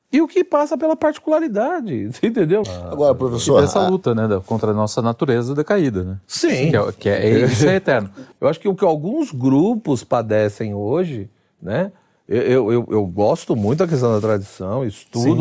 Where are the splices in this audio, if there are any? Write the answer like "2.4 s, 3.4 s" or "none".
2.6 s, 8.3 s